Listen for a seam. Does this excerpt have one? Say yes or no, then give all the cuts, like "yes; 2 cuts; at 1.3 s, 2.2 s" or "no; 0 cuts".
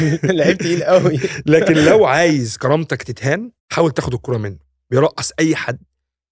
yes; 1 cut; at 3.6 s